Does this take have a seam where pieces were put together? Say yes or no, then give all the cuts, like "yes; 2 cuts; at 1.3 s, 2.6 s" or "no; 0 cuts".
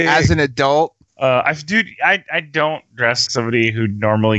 yes; 2 cuts; at 1.1 s, 3.3 s